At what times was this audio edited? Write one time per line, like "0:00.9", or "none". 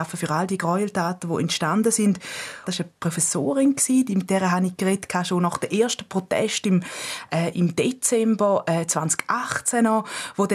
0:02.7